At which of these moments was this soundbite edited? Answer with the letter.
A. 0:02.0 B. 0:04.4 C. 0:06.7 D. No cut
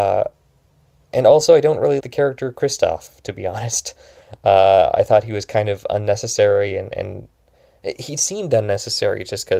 A